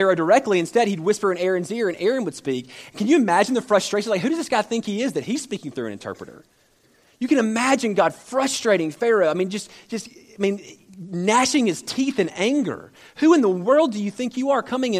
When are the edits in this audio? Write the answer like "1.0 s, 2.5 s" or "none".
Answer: none